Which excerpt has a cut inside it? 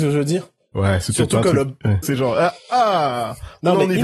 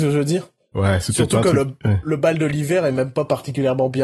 first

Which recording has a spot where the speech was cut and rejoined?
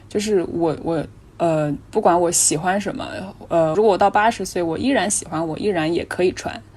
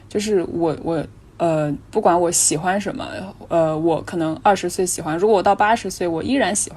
first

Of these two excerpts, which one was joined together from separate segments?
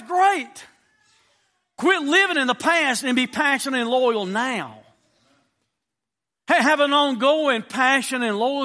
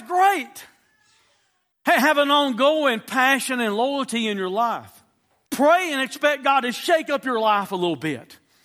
second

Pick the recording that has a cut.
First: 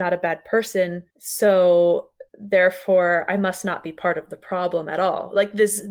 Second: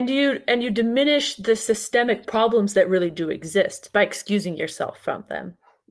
first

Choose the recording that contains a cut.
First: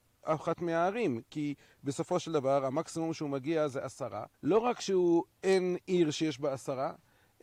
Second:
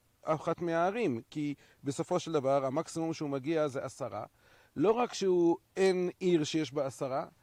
first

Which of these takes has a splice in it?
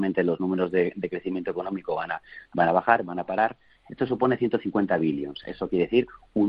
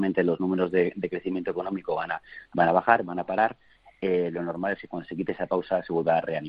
first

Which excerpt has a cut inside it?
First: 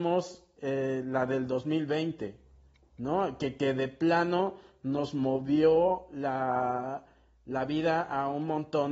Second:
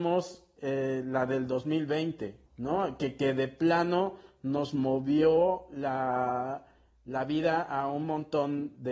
second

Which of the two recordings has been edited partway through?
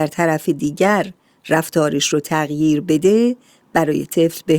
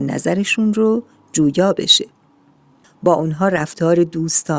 second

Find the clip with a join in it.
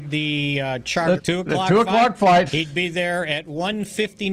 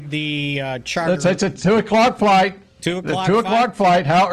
first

